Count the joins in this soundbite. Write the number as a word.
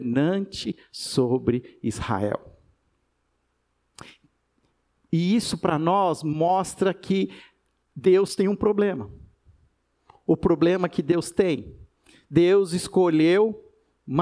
zero